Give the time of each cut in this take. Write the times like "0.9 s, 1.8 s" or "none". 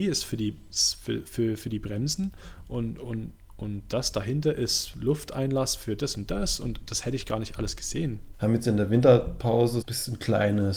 8.3 s, 9.8 s